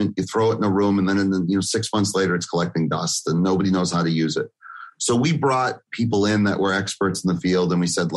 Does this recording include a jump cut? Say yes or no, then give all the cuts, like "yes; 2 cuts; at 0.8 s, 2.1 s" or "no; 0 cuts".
no; 0 cuts